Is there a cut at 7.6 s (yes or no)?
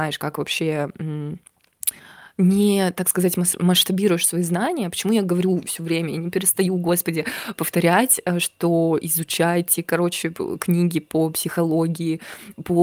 yes